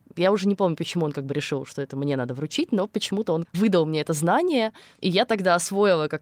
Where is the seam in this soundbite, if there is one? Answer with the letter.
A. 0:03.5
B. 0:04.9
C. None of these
A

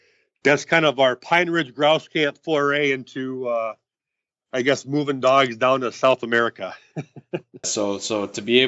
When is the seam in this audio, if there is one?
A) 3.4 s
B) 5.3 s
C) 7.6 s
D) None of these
C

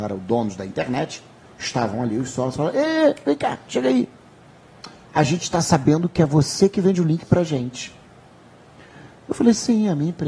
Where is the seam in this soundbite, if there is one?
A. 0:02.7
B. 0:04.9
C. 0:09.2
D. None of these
D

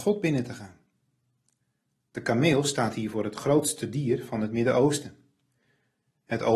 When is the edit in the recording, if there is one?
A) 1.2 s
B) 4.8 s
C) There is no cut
C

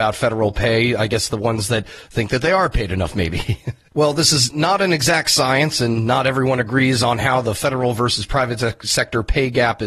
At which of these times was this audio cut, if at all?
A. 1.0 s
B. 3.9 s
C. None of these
B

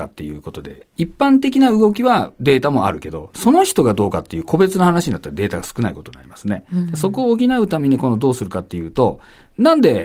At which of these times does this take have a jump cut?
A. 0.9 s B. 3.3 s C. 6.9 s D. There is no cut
A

